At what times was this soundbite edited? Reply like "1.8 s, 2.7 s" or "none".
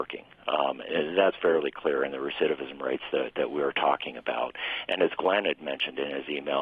none